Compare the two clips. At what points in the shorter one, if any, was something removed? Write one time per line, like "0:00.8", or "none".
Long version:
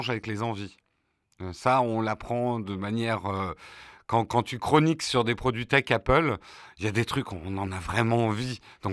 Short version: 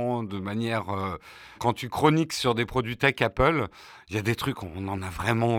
0:01.6